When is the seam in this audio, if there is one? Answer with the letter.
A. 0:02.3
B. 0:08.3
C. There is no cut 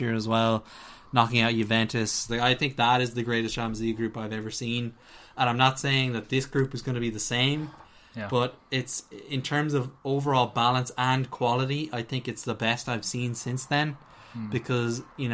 A